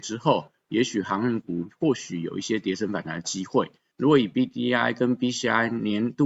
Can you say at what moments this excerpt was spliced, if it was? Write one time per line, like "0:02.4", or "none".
0:03.9